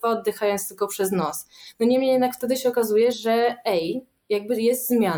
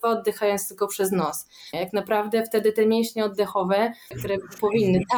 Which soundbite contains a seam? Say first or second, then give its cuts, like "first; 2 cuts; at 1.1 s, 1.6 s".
second; 2 cuts; at 1.7 s, 4.1 s